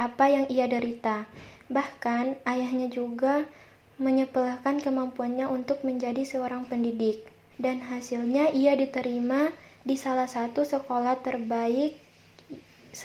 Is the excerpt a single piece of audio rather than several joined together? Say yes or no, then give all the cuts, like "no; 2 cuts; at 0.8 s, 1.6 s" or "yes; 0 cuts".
no; 1 cut; at 7.5 s